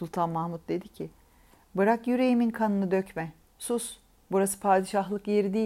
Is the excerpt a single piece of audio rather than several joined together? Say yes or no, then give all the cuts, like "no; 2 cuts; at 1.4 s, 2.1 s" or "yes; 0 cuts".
yes; 0 cuts